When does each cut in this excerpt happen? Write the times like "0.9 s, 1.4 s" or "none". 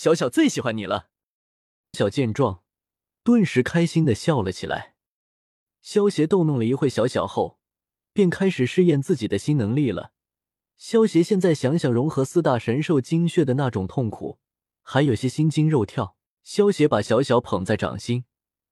1.9 s, 16.4 s